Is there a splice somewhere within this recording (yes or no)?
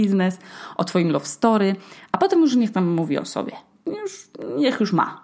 no